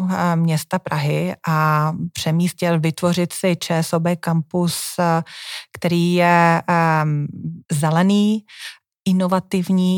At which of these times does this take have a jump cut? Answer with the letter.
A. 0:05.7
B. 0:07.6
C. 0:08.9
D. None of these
B